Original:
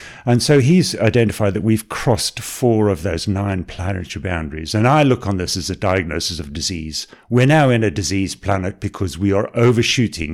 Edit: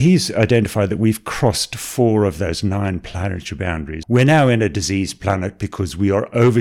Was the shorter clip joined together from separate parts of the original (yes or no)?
yes